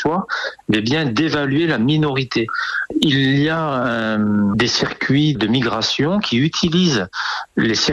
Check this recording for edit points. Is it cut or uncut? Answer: uncut